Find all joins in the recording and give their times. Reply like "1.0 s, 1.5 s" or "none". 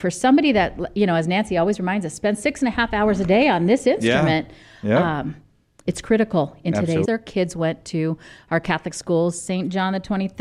7.0 s